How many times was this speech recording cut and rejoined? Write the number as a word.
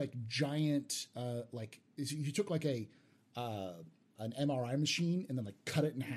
one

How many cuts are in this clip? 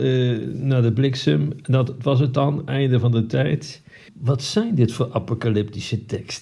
one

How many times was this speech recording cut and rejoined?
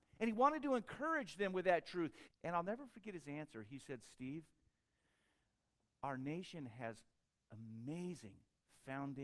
one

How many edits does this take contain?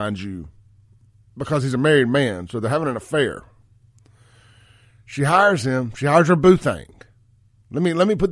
zero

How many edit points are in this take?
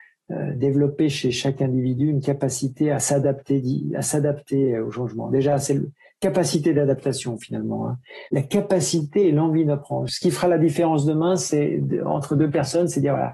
two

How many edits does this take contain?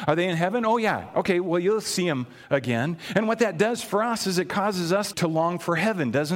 one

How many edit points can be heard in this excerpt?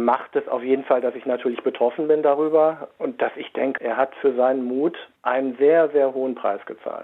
one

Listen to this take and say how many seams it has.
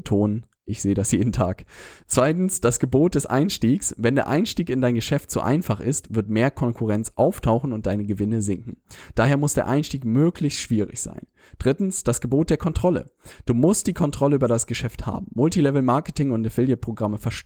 zero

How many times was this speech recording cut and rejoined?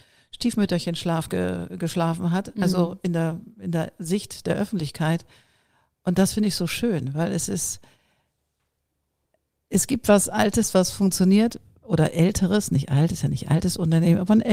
zero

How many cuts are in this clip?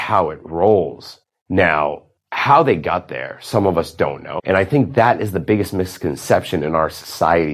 two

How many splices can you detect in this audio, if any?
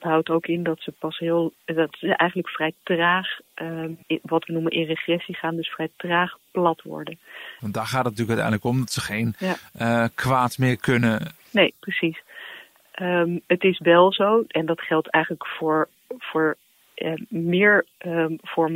three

